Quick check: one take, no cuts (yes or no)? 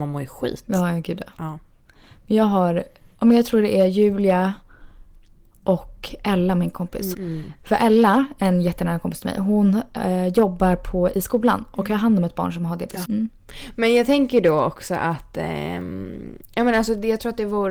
no